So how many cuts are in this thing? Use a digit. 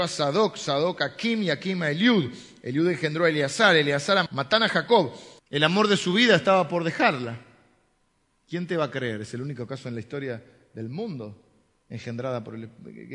2